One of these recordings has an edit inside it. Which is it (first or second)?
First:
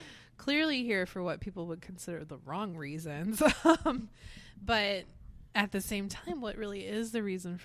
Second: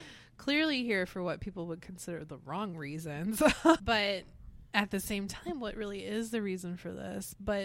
second